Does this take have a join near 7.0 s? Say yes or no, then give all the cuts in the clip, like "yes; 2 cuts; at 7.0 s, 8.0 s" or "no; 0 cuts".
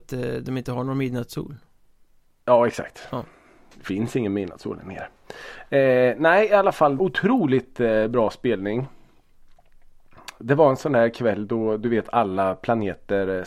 yes; 1 cut; at 7.0 s